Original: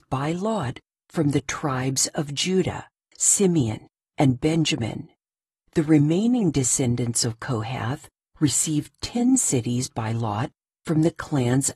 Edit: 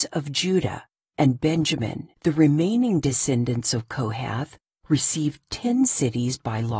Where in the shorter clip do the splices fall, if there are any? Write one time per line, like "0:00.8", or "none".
0:01.0
0:02.1